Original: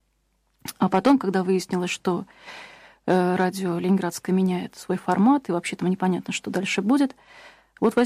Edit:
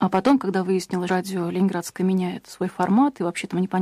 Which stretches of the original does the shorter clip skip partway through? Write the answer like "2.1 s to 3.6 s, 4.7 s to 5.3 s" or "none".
1.9 s to 3.4 s